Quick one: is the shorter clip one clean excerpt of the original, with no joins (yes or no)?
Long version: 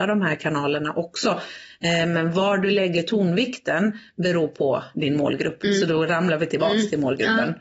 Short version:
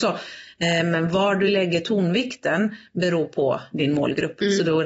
yes